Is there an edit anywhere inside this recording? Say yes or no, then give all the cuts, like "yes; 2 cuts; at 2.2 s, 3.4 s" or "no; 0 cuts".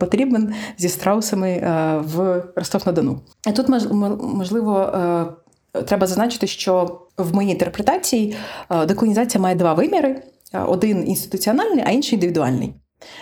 yes; 1 cut; at 7.1 s